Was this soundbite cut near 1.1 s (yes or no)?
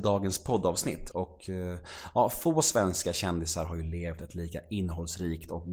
yes